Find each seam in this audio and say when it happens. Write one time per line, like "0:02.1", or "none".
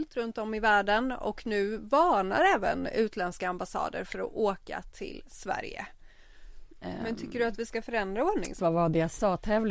0:06.7
0:08.6